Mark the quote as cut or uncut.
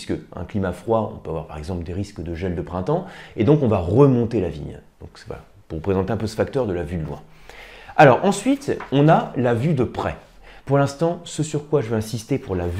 cut